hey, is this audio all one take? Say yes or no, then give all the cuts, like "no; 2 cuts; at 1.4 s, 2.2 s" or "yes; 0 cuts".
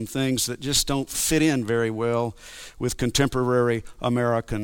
yes; 0 cuts